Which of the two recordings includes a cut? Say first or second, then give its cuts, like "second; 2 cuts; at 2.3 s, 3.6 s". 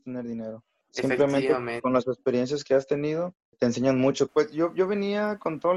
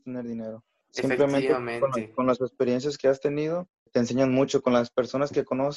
first; 2 cuts; at 1.8 s, 4.3 s